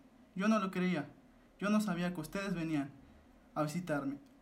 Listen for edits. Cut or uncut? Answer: cut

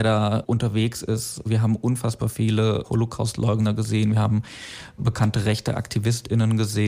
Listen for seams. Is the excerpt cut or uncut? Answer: cut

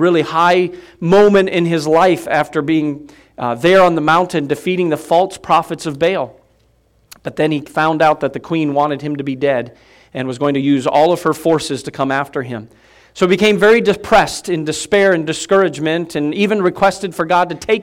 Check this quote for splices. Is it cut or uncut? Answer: uncut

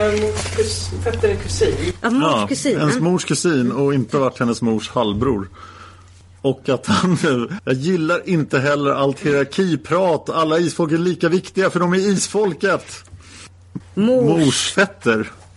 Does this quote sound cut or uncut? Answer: cut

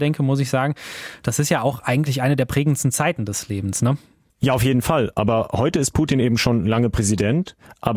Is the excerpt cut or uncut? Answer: uncut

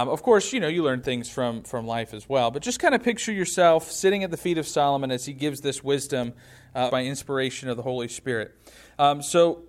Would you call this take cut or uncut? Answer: cut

